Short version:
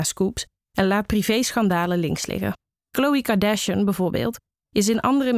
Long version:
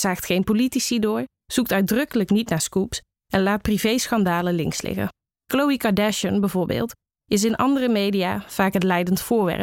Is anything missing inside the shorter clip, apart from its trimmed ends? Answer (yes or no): no